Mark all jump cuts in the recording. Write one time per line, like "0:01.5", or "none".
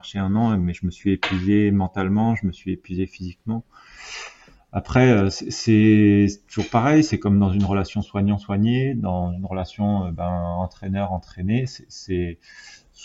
none